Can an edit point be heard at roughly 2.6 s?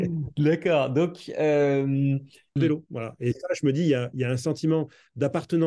yes; 1 cut; at 2.6 s

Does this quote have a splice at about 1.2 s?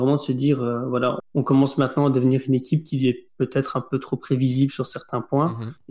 yes; 1 cut; at 1.2 s

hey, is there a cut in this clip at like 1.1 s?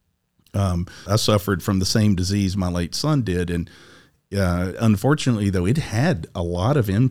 yes; 2 cuts; at 1.1 s, 4.7 s

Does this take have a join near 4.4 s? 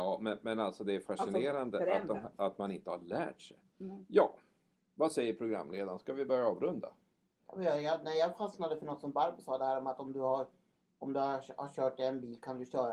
no; 0 cuts

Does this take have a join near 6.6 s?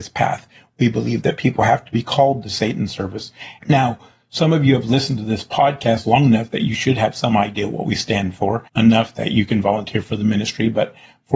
no; 2 cuts; at 3.6 s, 8.7 s

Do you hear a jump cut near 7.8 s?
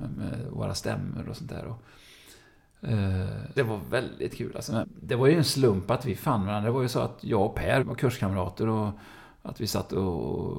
yes; 3 cuts; at 3.6 s, 4.8 s, 7.8 s

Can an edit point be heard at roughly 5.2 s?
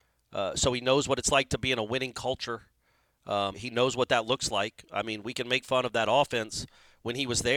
no; 1 cut; at 3.5 s

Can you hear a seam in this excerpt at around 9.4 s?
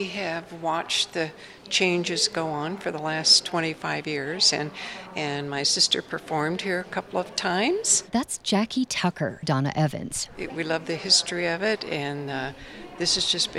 yes; 2 cuts; at 9.4 s, 10.5 s

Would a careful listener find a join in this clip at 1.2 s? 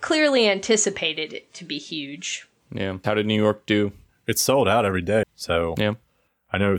no; 2 cuts; at 3.0 s, 5.2 s

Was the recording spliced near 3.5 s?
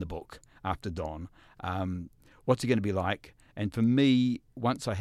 no; 0 cuts

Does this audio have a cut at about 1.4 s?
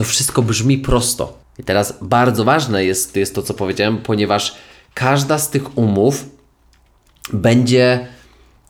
yes; 1 cut; at 1.4 s

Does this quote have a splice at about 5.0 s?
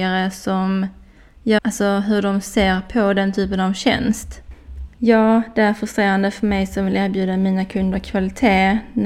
yes; 2 cuts; at 1.6 s, 5.0 s

